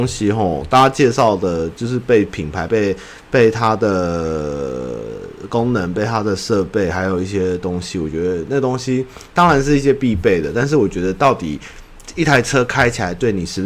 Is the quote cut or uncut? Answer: uncut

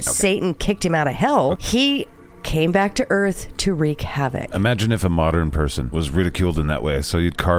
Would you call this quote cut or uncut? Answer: cut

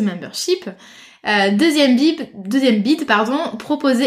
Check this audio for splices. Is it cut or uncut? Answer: uncut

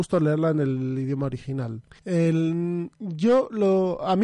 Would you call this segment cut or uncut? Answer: uncut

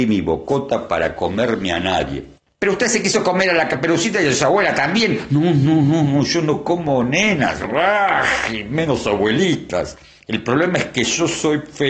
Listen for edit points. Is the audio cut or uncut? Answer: uncut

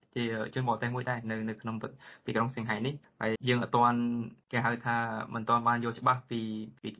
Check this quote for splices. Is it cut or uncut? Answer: cut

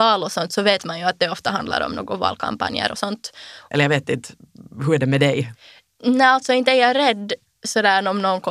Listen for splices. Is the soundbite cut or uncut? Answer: cut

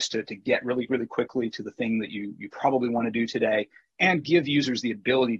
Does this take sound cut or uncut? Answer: uncut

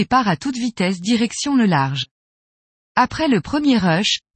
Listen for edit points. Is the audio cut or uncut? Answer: uncut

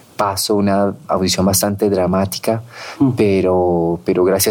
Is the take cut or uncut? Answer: uncut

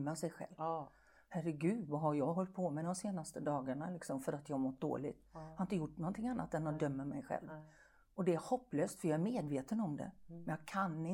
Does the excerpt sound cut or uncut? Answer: uncut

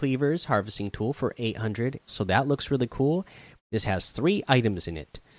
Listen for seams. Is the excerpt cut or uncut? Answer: cut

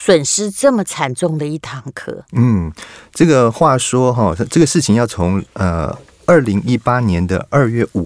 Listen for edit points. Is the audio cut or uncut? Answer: uncut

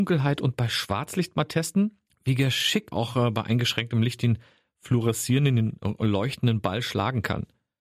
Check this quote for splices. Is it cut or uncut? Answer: cut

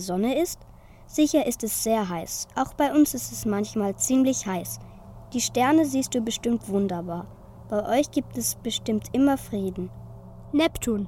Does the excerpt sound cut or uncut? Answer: uncut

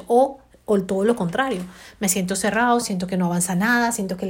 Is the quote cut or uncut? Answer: cut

